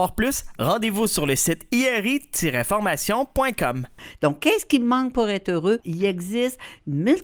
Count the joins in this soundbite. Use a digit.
1